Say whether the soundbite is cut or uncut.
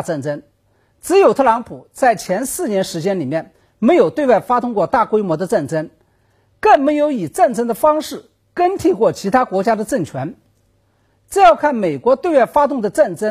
cut